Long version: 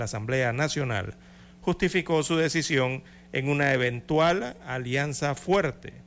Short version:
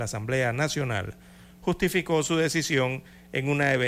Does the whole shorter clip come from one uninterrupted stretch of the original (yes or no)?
yes